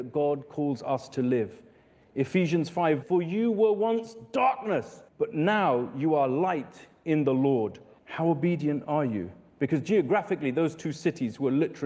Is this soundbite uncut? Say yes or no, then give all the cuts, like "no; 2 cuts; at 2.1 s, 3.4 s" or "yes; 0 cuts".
no; 3 cuts; at 3.0 s, 5.1 s, 8.0 s